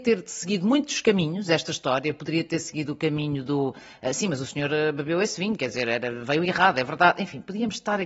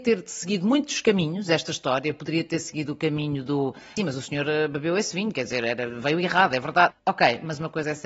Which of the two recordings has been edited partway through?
second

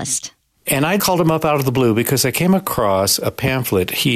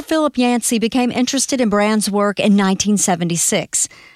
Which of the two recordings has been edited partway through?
first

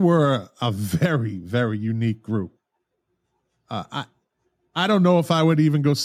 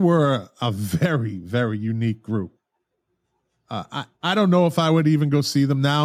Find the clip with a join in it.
second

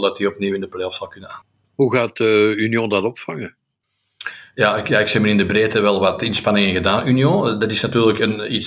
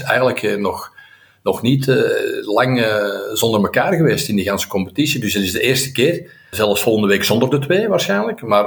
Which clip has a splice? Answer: second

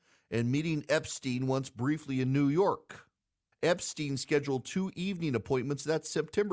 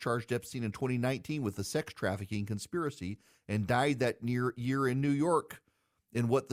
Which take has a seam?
first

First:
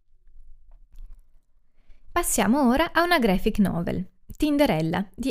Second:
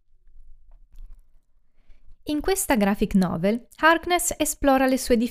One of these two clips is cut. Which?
second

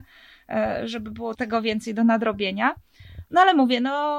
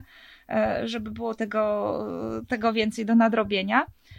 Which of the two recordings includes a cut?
first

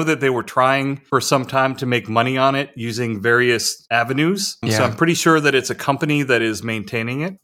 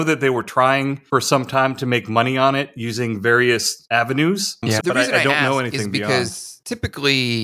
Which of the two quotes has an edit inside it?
second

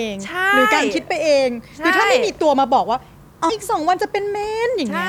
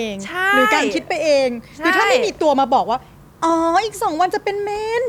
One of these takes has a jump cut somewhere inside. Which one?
first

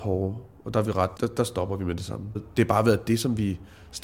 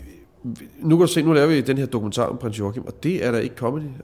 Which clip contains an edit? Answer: first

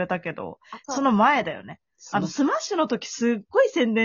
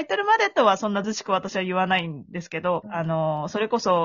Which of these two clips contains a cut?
second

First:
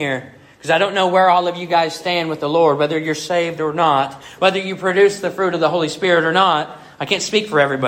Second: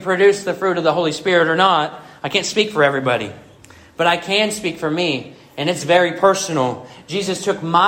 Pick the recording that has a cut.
first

